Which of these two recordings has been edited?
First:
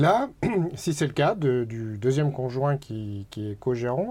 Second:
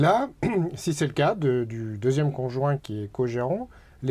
second; 1 cut; at 2.8 s

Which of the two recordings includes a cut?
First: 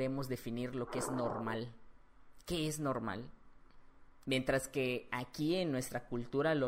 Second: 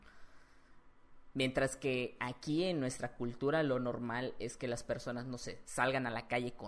first; 1 cut; at 4.2 s

